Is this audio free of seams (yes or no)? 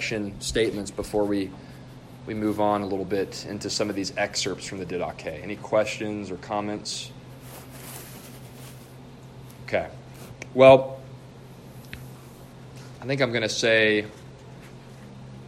yes